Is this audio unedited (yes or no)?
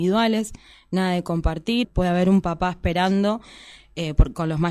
no